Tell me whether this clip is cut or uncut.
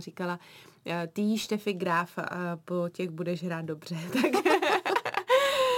uncut